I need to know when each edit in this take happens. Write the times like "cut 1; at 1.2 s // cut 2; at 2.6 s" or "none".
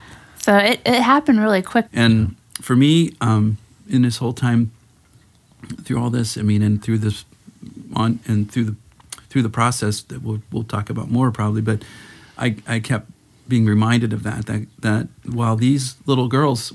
cut 1; at 1.9 s